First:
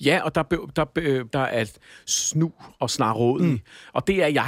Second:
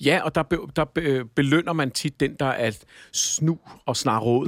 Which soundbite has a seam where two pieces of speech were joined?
first; 1 cut; at 1.3 s

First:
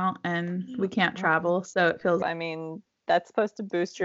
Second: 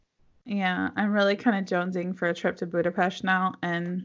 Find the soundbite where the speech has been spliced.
first; 1 cut; at 2.2 s

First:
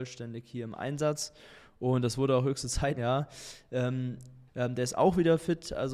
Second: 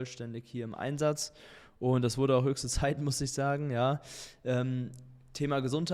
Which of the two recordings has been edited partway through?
first; 2 cuts; at 3.0 s, 4.5 s

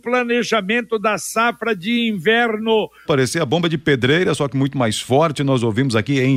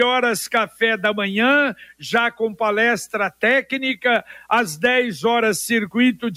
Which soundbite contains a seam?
first; 1 cut; at 3.0 s

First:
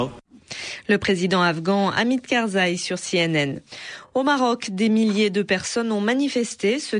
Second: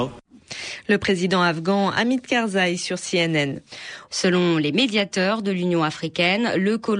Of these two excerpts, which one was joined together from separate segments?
second; 1 cut; at 4.1 s

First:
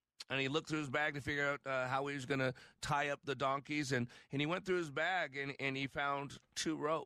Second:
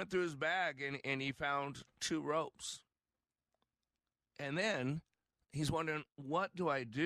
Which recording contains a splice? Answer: second; 1 cut; at 4.3 s

